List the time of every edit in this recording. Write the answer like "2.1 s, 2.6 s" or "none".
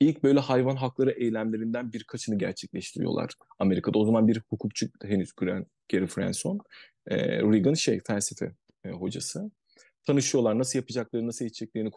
none